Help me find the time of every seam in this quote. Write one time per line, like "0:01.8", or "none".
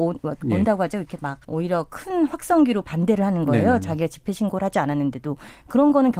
0:01.4